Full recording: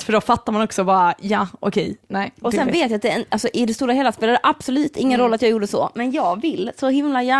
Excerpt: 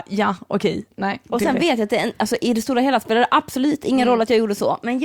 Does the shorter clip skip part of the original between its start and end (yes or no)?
no